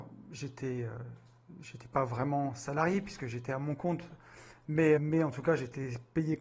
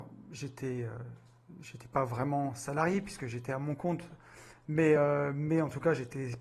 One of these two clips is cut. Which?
first; 1 cut; at 5.0 s

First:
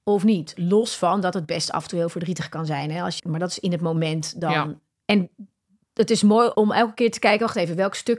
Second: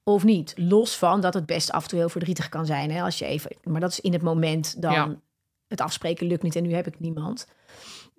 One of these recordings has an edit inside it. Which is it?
first; 3 cuts; at 3.2 s, 5.0 s, 6.5 s

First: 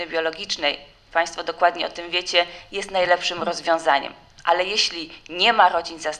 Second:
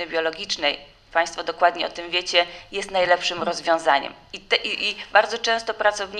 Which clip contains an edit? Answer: second; 1 cut; at 4.3 s

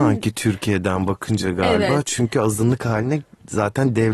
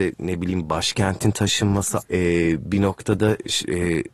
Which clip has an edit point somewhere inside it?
second; 1 cut; at 2.0 s

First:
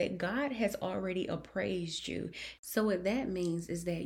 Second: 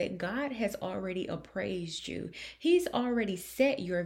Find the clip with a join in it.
first; 1 cut; at 2.6 s

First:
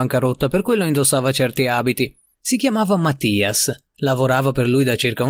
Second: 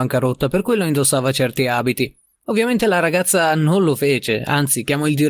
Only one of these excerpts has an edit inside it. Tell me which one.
first; 1 cut; at 2.3 s

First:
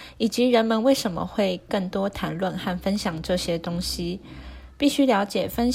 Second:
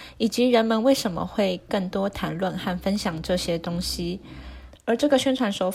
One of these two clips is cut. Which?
second; 1 cut; at 4.7 s

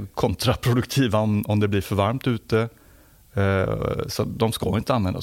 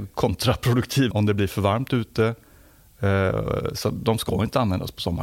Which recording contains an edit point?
second; 1 cut; at 1.1 s

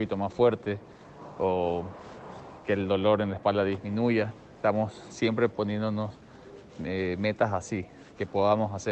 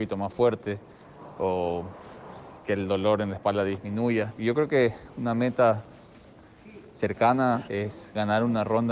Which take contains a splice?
second; 2 cuts; at 4.4 s, 7.7 s

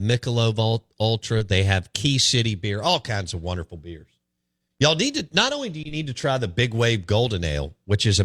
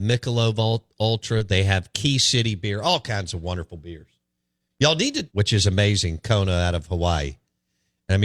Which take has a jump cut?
second; 1 cut; at 5.3 s

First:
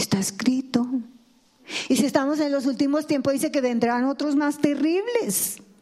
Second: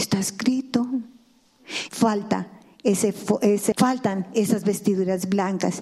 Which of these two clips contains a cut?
second; 2 cuts; at 1.9 s, 3.7 s

